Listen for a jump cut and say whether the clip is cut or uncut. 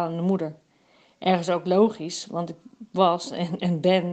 uncut